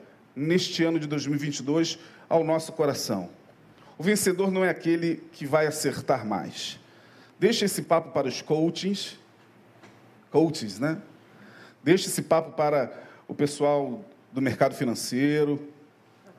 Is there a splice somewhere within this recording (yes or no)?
no